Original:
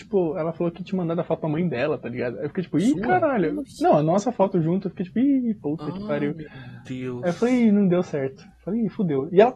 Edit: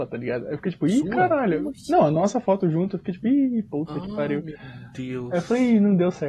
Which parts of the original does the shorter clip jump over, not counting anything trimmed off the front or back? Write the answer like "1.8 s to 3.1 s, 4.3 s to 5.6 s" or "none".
none